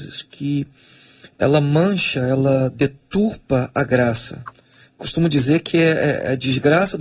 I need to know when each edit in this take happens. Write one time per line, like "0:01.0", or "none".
none